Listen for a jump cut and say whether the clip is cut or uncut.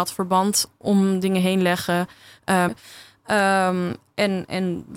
cut